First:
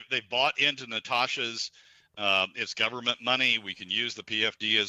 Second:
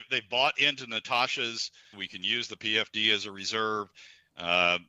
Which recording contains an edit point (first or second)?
second